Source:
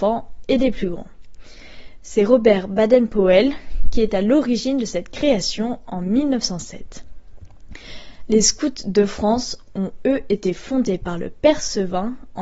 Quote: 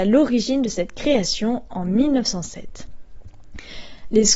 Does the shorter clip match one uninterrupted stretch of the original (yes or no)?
yes